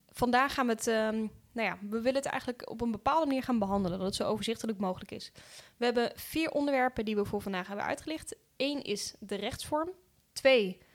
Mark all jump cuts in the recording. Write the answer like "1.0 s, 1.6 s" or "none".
none